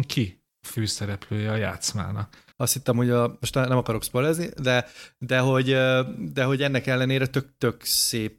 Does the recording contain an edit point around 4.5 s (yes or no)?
no